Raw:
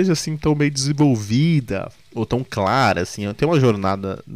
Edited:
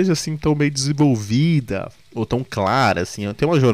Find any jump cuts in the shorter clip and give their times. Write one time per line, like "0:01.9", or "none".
none